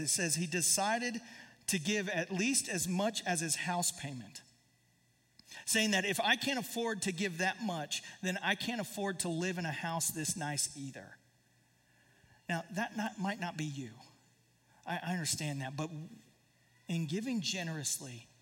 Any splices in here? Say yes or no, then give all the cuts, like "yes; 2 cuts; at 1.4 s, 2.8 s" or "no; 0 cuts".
no; 0 cuts